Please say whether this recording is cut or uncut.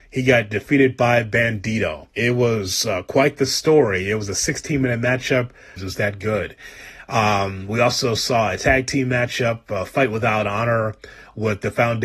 cut